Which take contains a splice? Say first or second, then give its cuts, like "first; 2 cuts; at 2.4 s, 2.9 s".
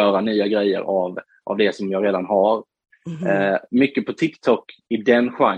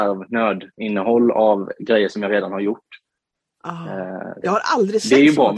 second; 1 cut; at 4.4 s